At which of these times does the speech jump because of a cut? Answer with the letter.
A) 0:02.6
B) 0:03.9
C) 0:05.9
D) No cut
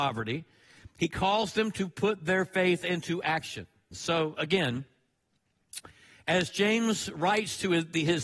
B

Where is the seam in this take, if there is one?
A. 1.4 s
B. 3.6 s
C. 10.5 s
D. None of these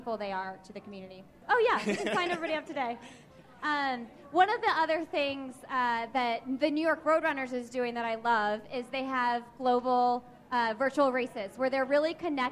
A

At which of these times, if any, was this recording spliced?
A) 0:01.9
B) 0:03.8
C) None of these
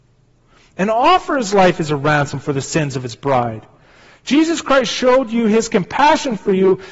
C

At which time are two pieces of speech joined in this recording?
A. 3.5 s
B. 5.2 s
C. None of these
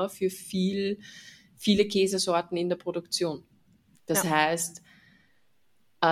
C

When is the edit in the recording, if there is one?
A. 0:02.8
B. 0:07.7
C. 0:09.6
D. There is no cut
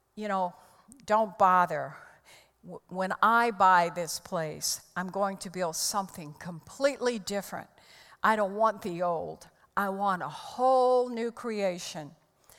D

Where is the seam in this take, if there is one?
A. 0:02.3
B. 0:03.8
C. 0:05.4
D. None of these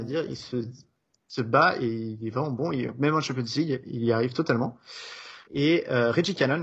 C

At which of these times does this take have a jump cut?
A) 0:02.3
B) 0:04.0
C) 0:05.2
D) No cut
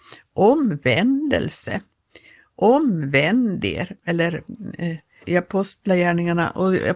C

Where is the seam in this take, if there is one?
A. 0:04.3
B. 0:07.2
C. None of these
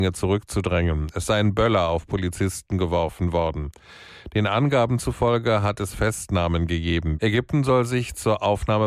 B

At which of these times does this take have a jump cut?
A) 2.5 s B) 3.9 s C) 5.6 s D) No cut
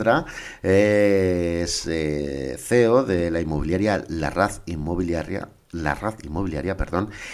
D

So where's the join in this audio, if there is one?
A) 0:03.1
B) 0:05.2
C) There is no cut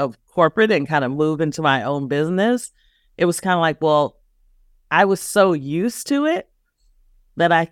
C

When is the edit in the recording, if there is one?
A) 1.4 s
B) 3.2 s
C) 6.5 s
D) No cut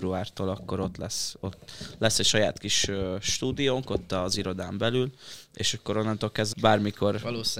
C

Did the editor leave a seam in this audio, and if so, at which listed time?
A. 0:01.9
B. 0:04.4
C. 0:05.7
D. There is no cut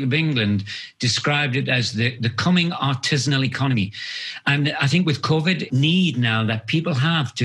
C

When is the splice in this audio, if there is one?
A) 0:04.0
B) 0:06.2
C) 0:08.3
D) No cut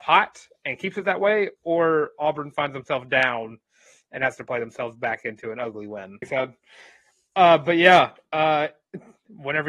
B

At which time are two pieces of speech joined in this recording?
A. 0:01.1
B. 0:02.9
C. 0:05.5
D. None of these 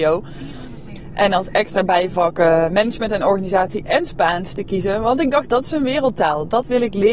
C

